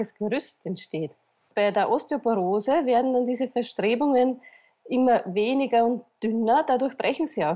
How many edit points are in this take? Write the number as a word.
zero